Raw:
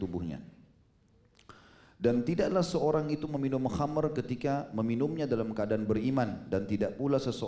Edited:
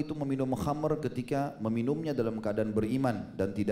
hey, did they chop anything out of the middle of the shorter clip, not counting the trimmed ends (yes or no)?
no